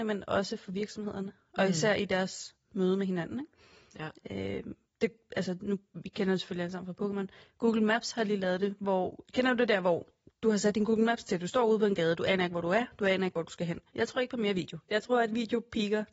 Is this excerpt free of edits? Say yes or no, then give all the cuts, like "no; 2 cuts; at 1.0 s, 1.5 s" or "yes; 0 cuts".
no; 1 cut; at 13.9 s